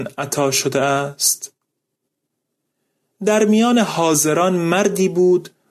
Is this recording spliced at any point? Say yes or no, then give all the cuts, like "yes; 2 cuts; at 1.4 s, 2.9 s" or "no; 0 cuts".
no; 0 cuts